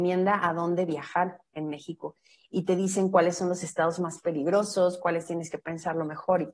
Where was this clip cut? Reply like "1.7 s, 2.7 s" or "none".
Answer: none